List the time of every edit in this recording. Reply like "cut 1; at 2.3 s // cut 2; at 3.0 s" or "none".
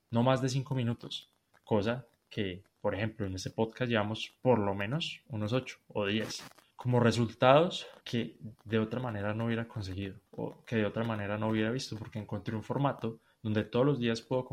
cut 1; at 6.7 s // cut 2; at 8.0 s // cut 3; at 10.3 s